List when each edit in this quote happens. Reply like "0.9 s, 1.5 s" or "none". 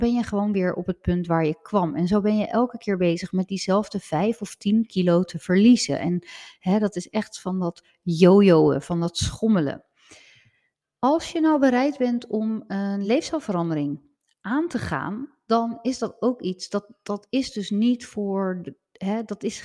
none